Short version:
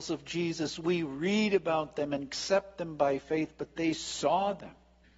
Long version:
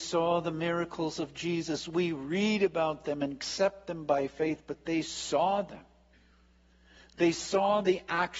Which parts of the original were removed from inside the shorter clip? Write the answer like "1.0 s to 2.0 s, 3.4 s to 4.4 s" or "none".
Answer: none